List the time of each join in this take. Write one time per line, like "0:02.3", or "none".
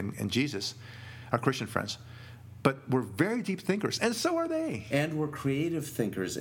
none